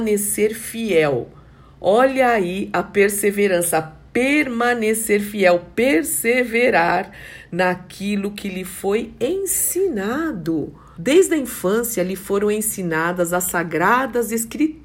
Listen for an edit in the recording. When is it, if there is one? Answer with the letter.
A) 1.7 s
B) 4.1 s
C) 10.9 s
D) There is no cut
C